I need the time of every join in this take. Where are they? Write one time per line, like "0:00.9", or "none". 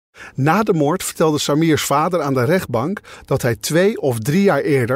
none